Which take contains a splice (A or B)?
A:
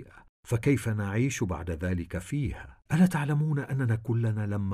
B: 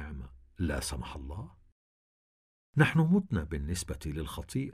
A